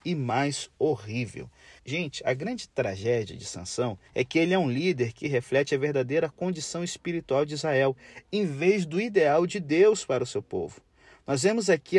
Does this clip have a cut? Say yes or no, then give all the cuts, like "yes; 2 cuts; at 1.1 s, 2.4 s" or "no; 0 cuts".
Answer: yes; 2 cuts; at 1.8 s, 4.1 s